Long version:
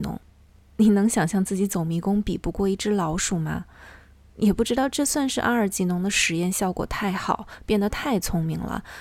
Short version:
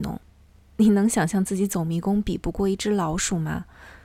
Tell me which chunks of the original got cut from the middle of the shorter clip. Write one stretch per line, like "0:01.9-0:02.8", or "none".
none